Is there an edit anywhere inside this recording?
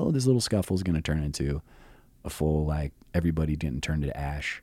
no; 0 cuts

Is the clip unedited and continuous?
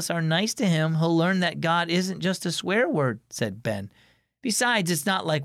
yes; 0 cuts

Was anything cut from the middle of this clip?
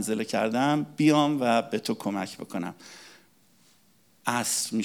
no; 0 cuts

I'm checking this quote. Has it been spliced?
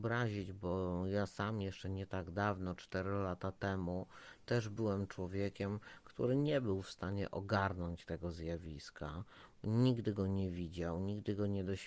no; 0 cuts

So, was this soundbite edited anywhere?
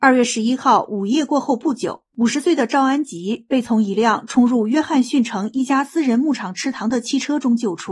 yes; 1 cut; at 2.1 s

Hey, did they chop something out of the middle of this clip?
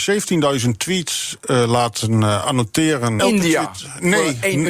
yes; 1 cut; at 3.2 s

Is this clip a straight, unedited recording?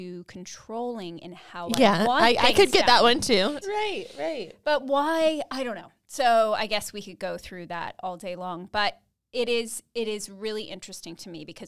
no; 1 cut; at 3.6 s

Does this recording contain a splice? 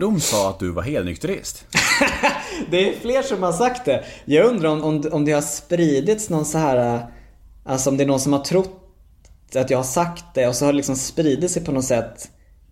no; 0 cuts

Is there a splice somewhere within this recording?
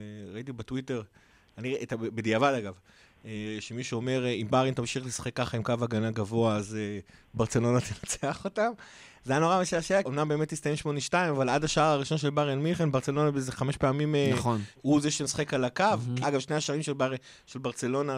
yes; 3 cuts; at 10.0 s, 14.7 s, 16.2 s

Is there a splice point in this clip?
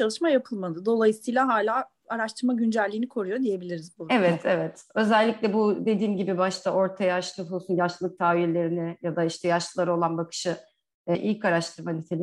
yes; 1 cut; at 11.1 s

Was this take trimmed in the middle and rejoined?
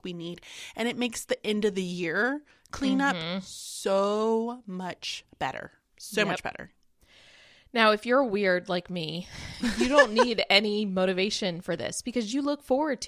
no; 0 cuts

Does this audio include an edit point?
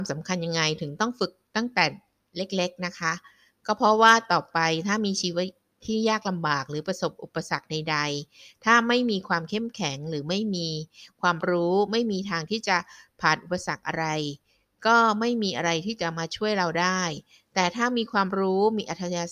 no; 0 cuts

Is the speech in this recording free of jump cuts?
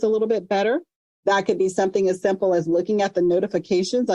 yes; 0 cuts

